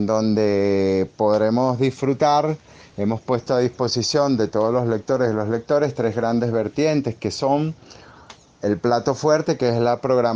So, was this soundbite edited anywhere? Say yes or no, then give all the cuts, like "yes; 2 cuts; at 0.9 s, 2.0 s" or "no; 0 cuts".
no; 0 cuts